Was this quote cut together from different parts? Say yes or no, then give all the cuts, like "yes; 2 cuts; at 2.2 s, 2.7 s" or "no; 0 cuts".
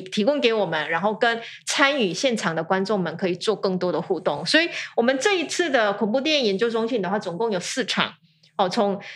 no; 0 cuts